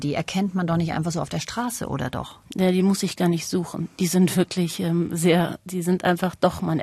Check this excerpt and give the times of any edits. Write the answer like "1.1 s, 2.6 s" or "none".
none